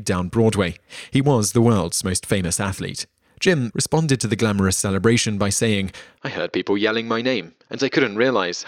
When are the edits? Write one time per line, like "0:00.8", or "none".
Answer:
0:03.7